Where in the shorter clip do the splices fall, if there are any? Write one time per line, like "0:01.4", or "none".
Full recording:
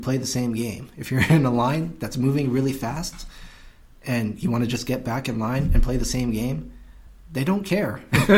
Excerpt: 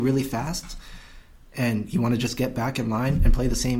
none